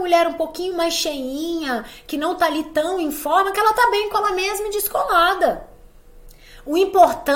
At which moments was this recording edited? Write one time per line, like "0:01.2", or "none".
none